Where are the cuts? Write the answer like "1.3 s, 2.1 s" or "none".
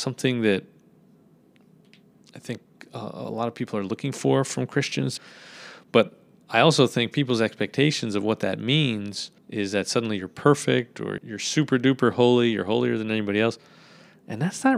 5.2 s, 9.4 s, 11.2 s